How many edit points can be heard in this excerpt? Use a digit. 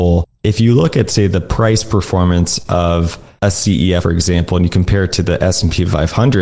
1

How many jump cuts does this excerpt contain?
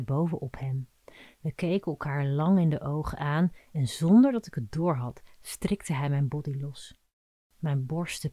0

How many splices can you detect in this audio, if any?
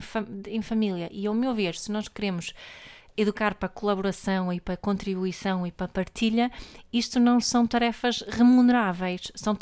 0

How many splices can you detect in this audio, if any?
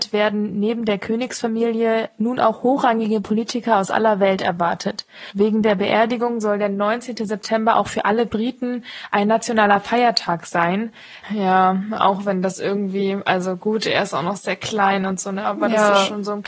1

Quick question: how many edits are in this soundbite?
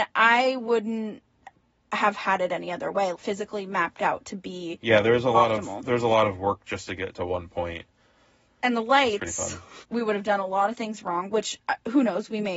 3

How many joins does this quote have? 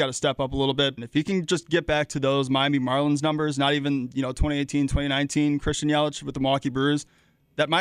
1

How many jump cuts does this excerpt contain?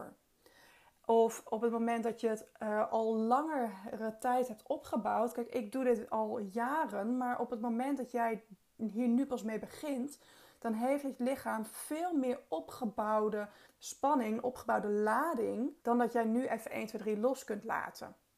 2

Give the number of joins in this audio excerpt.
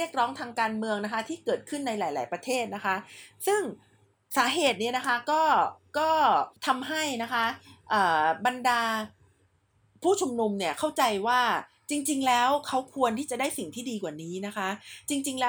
1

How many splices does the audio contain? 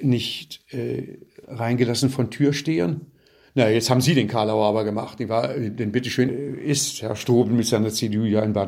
1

